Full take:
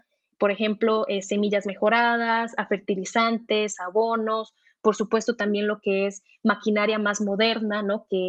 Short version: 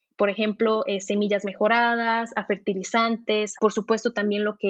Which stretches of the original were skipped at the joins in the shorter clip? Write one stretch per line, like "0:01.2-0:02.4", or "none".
0:03.8-0:04.8